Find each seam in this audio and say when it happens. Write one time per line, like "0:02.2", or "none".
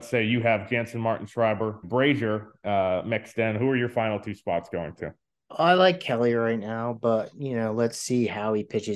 0:01.8